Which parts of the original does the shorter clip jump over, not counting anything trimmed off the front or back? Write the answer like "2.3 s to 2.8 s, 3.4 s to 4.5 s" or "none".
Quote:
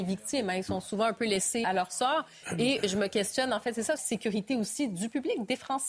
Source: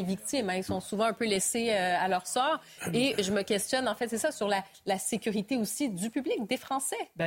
1.6 s to 2.0 s, 4.3 s to 5.0 s